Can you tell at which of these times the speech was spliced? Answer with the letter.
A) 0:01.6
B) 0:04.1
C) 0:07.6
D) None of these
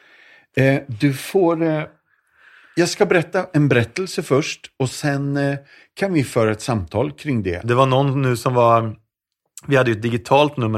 C